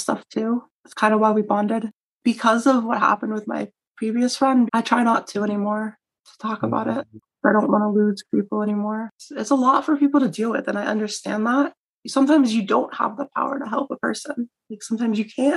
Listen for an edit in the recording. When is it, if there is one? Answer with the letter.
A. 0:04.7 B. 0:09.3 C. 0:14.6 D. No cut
A